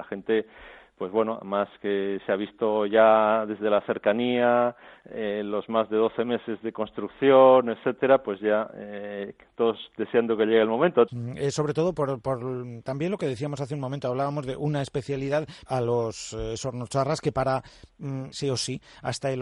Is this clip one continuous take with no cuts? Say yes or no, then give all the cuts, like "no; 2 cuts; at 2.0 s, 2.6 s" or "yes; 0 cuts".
no; 3 cuts; at 11.1 s, 15.7 s, 18.3 s